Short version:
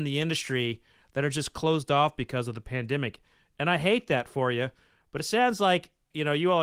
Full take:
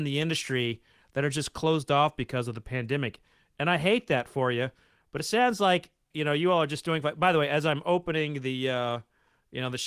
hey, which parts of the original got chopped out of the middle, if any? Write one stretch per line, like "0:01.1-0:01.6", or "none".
none